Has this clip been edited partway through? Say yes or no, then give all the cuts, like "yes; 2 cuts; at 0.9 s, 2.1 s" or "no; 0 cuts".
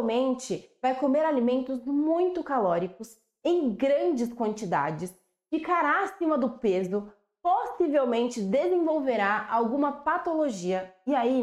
no; 0 cuts